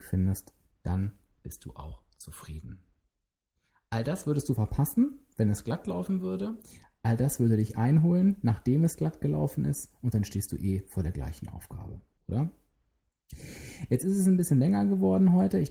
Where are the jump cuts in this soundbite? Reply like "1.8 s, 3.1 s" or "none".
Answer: 12.2 s, 13.9 s